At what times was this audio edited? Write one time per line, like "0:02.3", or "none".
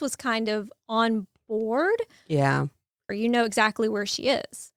0:03.1

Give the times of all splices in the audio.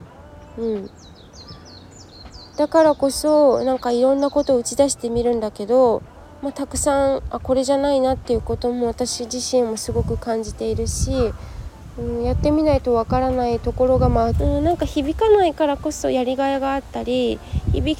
0:14.3

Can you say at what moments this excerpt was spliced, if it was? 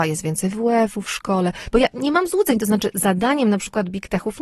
0:01.7

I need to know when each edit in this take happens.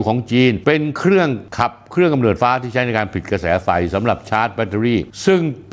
0:02.4

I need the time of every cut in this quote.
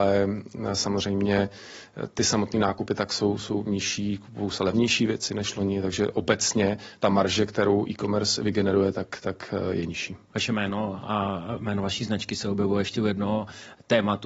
0:10.3

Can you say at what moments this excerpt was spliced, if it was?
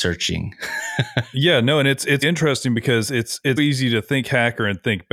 0:02.2
0:03.6

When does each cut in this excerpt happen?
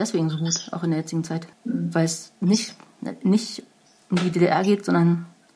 0:01.5

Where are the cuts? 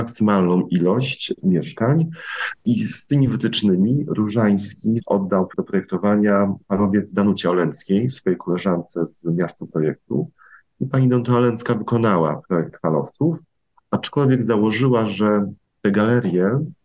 none

